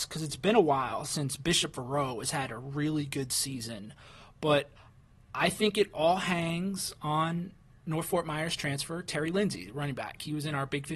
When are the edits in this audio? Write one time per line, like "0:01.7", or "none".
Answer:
none